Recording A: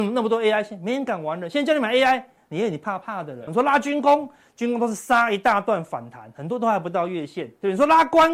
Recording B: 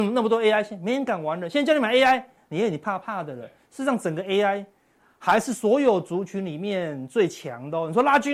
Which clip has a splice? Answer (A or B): A